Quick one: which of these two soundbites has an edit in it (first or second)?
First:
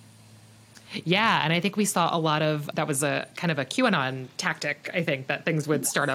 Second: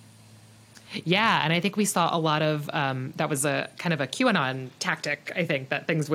first